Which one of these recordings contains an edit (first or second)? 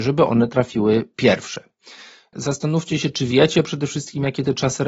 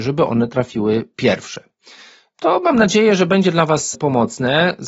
first